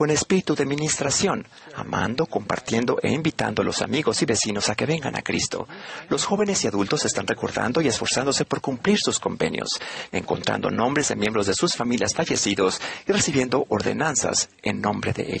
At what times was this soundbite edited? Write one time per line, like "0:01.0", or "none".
0:10.1